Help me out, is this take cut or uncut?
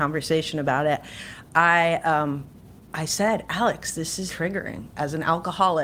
cut